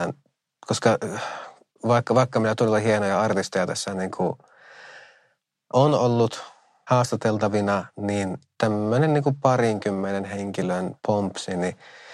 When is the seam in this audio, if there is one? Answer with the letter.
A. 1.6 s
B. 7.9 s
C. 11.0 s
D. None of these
C